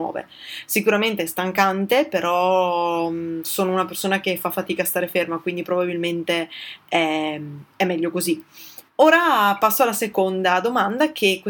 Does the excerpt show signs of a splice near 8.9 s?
yes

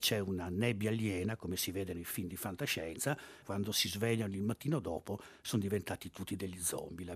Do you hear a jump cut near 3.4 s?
yes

